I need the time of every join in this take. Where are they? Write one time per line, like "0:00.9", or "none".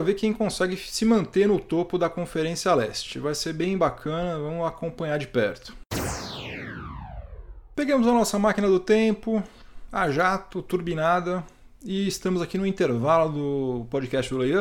none